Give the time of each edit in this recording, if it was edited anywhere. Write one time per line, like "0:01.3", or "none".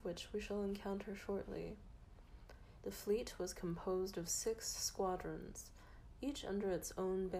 0:02.8